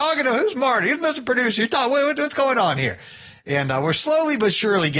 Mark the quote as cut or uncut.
uncut